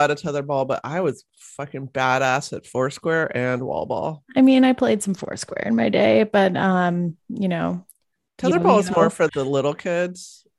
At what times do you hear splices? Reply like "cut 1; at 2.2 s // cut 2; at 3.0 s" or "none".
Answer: cut 1; at 9.3 s